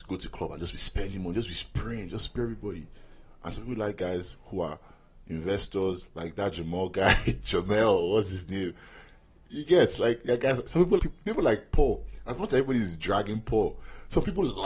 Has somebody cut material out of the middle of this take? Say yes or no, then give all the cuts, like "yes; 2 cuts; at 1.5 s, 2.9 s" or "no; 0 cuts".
yes; 1 cut; at 11.0 s